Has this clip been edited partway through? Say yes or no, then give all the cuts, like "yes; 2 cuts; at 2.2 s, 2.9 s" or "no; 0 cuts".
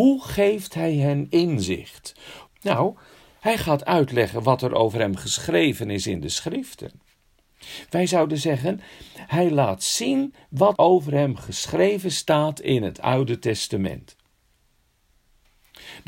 yes; 2 cuts; at 2.5 s, 10.8 s